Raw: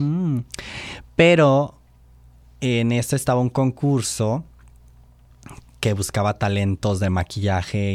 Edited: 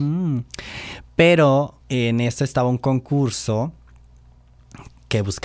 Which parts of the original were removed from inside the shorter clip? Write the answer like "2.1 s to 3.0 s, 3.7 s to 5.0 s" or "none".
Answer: 1.8 s to 2.5 s